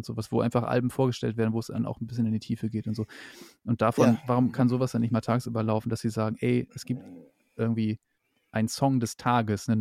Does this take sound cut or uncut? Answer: uncut